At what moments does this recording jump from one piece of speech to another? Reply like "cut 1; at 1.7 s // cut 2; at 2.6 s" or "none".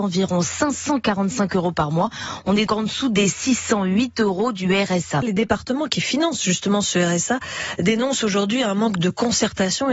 cut 1; at 2.7 s // cut 2; at 5.2 s